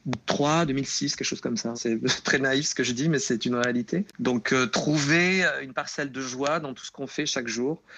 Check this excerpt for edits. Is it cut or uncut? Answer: cut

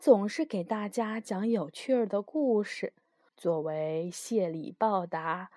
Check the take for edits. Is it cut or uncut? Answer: cut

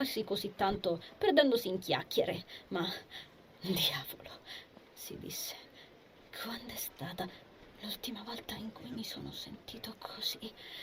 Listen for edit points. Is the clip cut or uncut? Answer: uncut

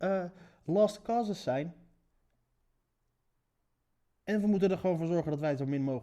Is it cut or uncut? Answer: uncut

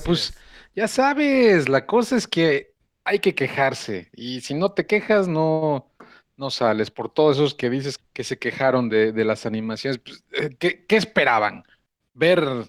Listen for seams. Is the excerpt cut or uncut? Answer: cut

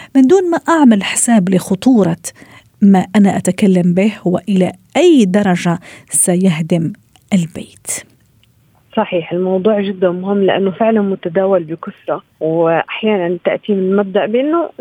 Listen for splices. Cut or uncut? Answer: cut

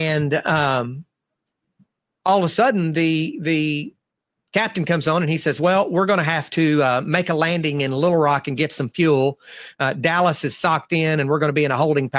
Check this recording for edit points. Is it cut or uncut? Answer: uncut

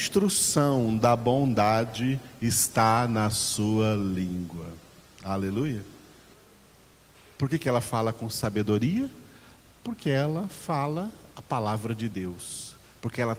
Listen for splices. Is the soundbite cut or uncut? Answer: uncut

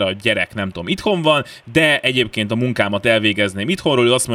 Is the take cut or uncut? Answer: uncut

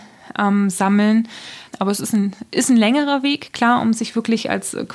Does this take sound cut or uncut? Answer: cut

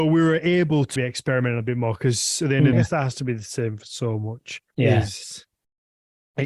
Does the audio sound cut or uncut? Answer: cut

